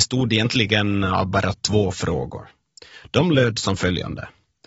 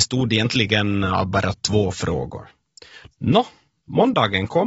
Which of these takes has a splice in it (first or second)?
second